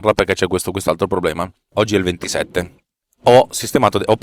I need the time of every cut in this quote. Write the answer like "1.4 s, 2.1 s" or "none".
1.7 s